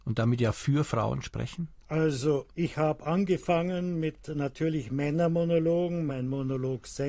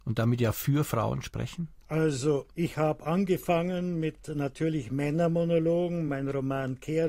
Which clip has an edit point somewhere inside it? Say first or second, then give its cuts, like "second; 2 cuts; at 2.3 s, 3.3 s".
first; 1 cut; at 6.1 s